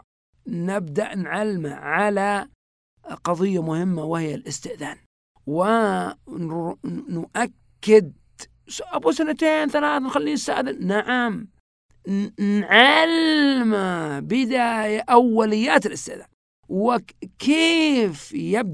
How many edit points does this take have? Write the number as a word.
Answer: zero